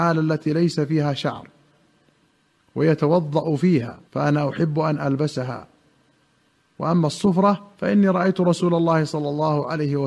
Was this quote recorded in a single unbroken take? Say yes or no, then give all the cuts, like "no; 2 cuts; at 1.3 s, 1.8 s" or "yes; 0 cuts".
no; 2 cuts; at 4.1 s, 7.7 s